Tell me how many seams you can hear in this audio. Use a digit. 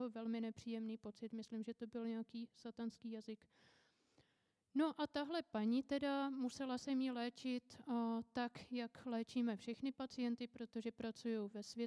0